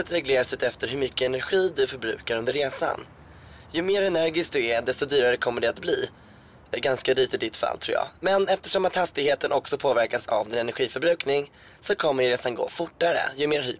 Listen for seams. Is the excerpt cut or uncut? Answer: uncut